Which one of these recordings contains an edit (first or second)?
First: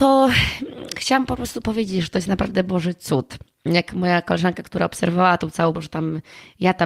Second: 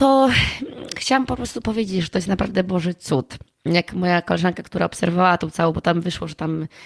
first